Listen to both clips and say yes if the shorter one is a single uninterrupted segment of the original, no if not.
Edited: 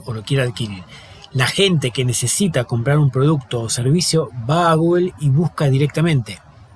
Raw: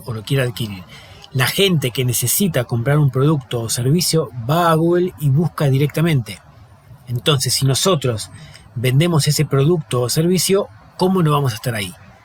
yes